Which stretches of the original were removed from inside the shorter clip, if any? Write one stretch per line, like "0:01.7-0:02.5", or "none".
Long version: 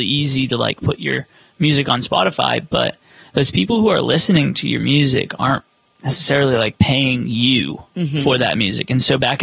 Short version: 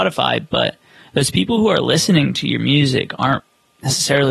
none